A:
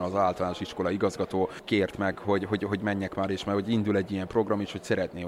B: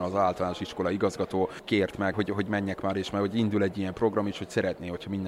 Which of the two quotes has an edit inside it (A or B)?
B